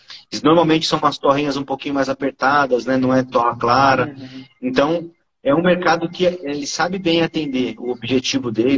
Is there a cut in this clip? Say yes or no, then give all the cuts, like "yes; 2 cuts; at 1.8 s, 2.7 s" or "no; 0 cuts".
no; 0 cuts